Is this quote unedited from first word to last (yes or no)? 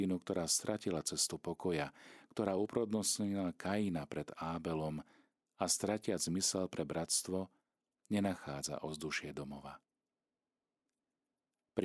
yes